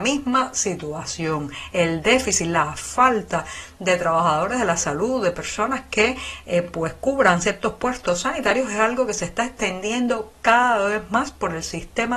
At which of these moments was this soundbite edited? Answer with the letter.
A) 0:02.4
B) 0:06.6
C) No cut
C